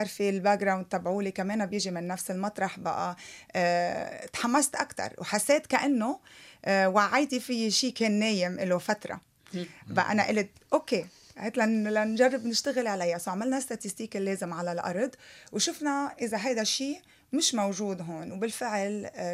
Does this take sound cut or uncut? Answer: uncut